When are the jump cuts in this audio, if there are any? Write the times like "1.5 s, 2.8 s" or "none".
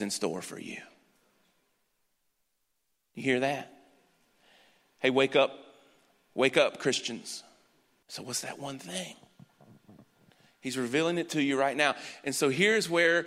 8.0 s